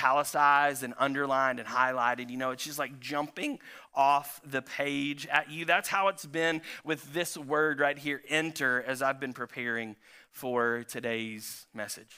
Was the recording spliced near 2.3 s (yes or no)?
no